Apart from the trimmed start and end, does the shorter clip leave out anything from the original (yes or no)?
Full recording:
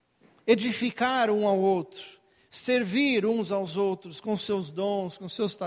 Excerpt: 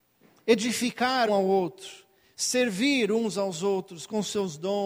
yes